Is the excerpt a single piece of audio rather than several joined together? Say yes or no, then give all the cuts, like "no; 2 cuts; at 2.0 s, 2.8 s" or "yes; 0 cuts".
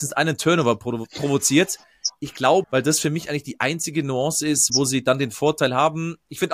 no; 2 cuts; at 2.6 s, 4.7 s